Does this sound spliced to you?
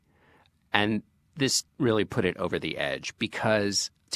no; 0 cuts

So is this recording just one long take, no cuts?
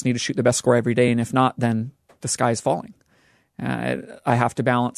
yes; 0 cuts

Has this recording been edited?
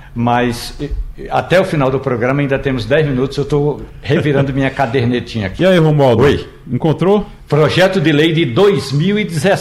no; 0 cuts

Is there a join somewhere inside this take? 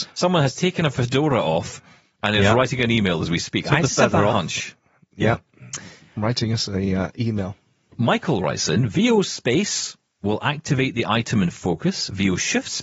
no; 0 cuts

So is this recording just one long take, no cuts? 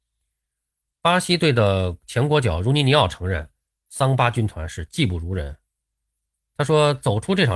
yes; 0 cuts

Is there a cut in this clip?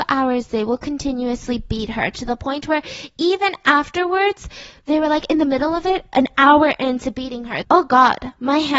yes; 1 cut; at 7.6 s

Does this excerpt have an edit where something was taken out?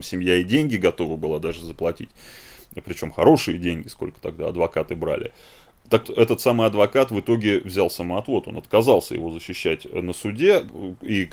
yes; 1 cut; at 6.0 s

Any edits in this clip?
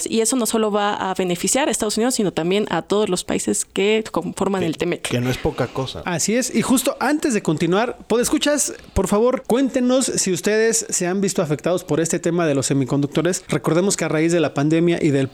yes; 1 cut; at 6.0 s

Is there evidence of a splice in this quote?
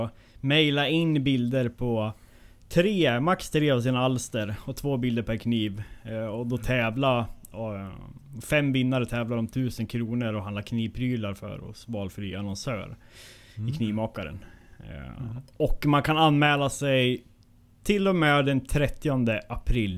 no; 0 cuts

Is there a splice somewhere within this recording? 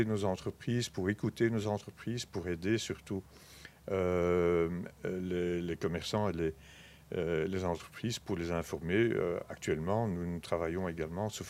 no; 0 cuts

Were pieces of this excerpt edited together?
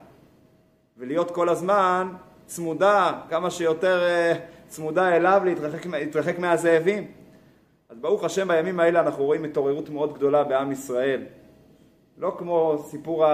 no; 0 cuts

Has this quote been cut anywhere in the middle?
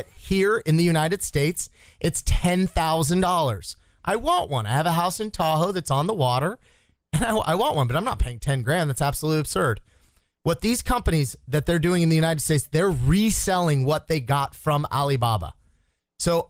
no; 0 cuts

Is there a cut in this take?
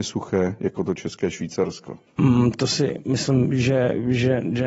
yes; 1 cut; at 2.1 s

